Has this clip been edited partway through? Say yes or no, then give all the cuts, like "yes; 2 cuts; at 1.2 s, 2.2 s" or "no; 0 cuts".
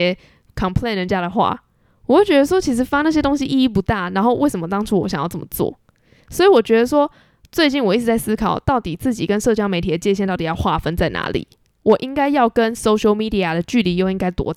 no; 0 cuts